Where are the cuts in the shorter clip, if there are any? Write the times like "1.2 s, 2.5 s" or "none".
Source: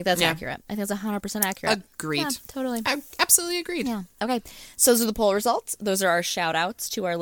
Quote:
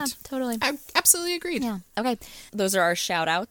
2.5 s